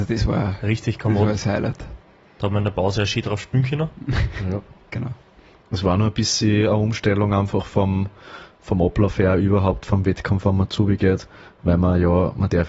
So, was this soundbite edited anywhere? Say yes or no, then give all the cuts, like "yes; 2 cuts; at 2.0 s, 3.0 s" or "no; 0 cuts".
no; 0 cuts